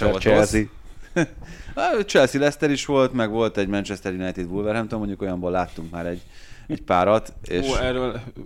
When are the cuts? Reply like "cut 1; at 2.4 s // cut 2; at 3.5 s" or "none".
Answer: none